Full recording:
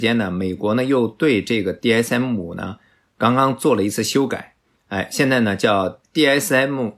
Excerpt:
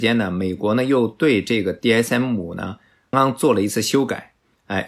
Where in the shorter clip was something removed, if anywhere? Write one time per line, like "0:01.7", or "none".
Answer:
0:03.1